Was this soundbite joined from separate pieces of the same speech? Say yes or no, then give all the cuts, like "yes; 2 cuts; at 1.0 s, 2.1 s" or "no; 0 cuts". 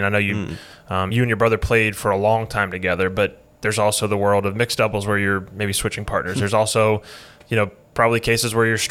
no; 0 cuts